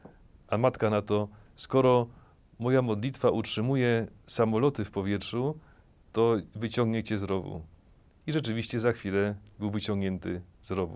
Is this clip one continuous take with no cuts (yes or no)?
no